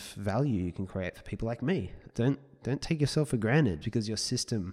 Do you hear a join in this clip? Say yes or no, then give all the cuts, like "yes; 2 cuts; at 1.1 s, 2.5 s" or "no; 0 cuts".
yes; 2 cuts; at 2.1 s, 3.8 s